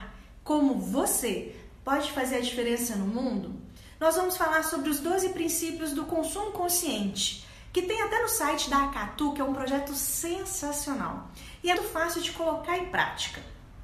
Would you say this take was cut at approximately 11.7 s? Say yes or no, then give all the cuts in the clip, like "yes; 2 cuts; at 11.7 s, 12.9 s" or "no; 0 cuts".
yes; 1 cut; at 11.7 s